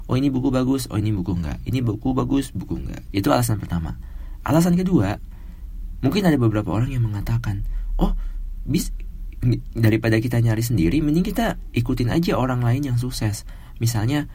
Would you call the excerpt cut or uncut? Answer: cut